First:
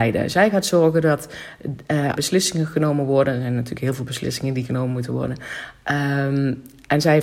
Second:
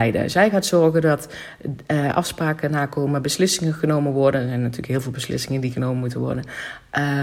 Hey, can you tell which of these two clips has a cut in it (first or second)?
first